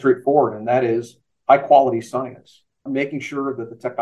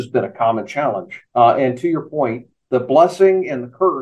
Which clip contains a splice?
second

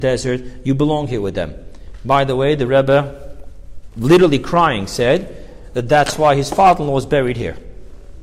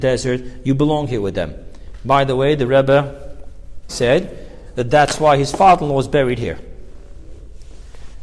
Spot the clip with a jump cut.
second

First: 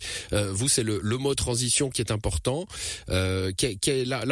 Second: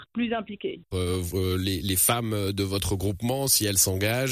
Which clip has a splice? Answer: second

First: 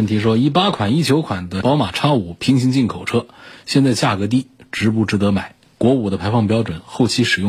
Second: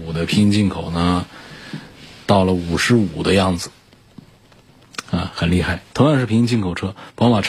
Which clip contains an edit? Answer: second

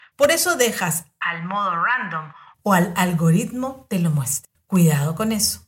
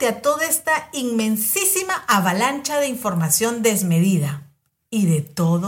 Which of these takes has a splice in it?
first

